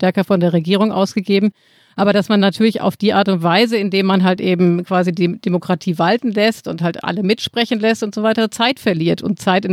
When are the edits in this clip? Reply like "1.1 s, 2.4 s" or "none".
none